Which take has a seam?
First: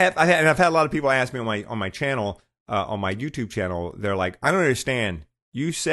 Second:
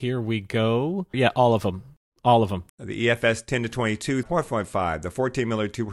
second; 3 cuts; at 1.1 s, 2.7 s, 4.2 s

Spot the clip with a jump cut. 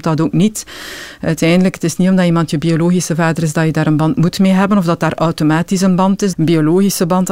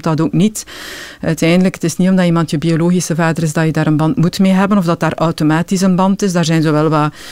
first; 1 cut; at 6.3 s

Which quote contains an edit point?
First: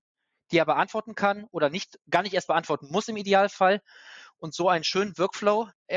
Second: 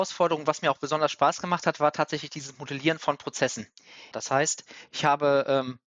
second; 1 cut; at 4.1 s

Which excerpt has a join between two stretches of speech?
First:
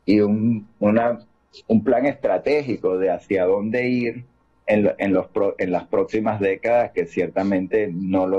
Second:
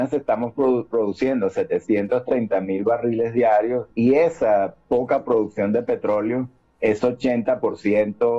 second; 1 cut; at 3.9 s

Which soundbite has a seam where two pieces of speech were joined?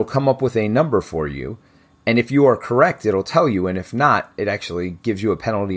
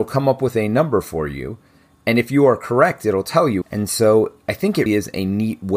second; 2 cuts; at 3.6 s, 4.9 s

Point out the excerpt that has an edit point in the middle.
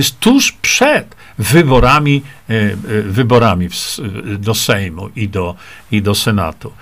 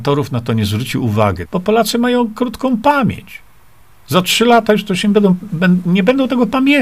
second; 1 cut; at 1.4 s

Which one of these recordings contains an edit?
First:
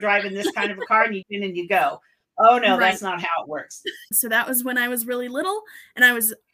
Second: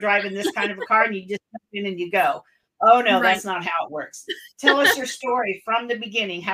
first; 2 cuts; at 1.2 s, 4.1 s

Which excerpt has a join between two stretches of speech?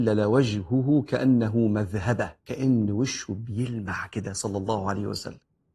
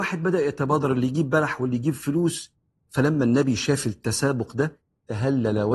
first; 1 cut; at 2.4 s

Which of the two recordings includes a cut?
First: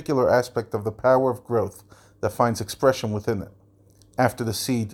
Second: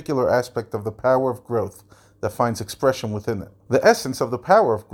second; 1 cut; at 3.7 s

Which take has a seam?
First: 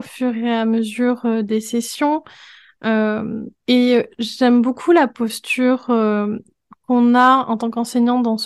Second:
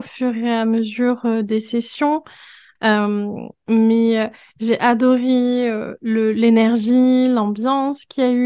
second; 1 cut; at 2.8 s

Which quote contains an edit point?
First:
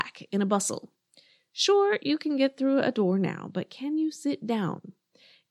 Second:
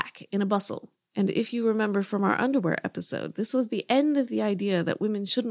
second; 1 cut; at 1.1 s

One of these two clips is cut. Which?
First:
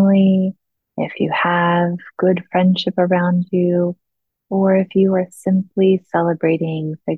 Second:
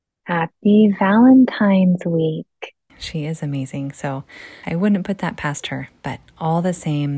second; 1 cut; at 2.9 s

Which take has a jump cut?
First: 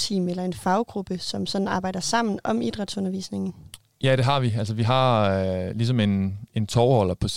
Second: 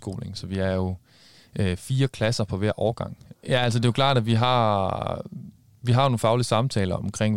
second; 1 cut; at 3.3 s

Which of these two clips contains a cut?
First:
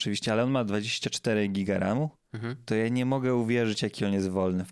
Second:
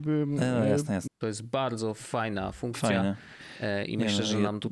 second; 1 cut; at 1.1 s

